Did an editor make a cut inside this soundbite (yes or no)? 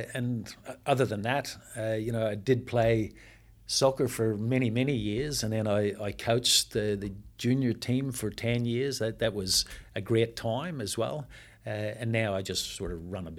no